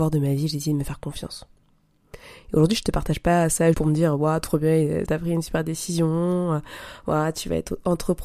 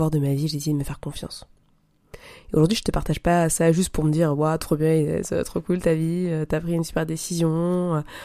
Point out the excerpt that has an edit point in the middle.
first; 2 cuts; at 3.7 s, 5.1 s

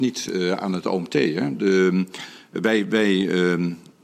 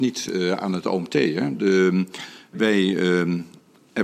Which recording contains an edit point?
second; 1 cut; at 2.5 s

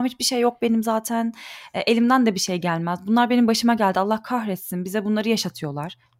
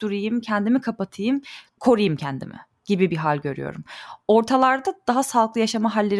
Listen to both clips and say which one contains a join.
second; 1 cut; at 1.7 s

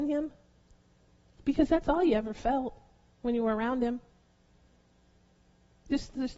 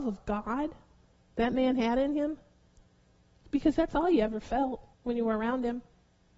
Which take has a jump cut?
second; 1 cut; at 4.9 s

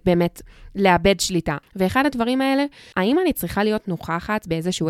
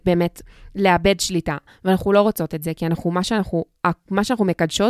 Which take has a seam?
first; 2 cuts; at 1.6 s, 2.9 s

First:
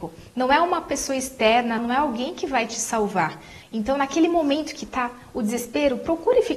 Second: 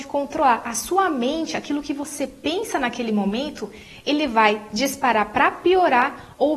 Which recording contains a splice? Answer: first; 2 cuts; at 1.8 s, 3.6 s

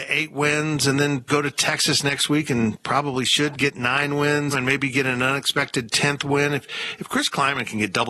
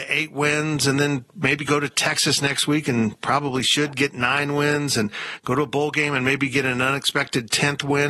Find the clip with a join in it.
first; 2 cuts; at 1.3 s, 4.5 s

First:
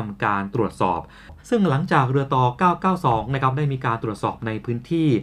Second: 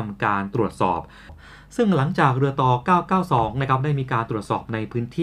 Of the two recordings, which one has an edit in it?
first; 1 cut; at 1.4 s

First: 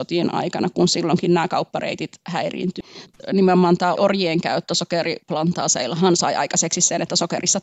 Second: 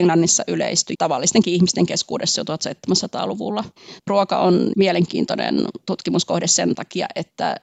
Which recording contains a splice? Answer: second; 1 cut; at 4.7 s

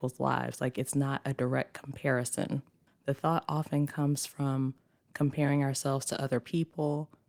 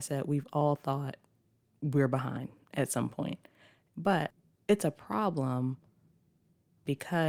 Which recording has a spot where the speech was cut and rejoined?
first; 1 cut; at 2.9 s

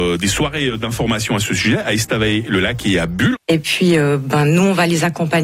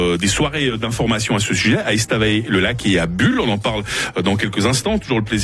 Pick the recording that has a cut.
first; 1 cut; at 3.3 s

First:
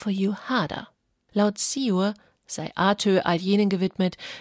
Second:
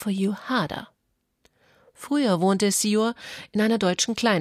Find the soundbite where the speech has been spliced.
first; 1 cut; at 1.3 s

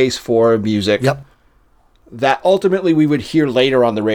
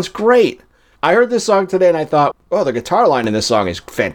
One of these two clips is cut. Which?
second; 2 cuts; at 1.0 s, 2.3 s

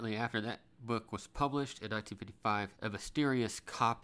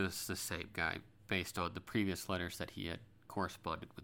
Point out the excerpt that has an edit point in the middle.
first; 1 cut; at 2.8 s

